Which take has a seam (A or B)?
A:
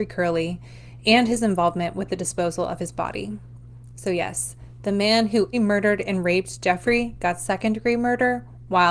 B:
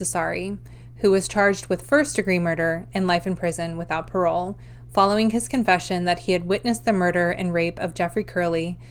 A